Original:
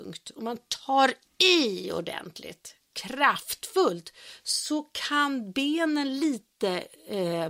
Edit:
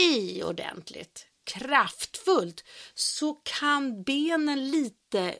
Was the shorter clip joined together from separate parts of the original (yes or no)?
no